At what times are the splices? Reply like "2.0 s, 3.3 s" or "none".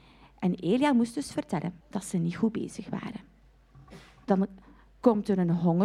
1.8 s, 4.2 s